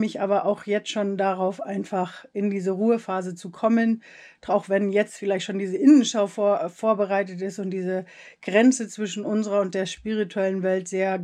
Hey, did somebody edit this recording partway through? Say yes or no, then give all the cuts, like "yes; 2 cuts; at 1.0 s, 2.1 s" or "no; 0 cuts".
no; 0 cuts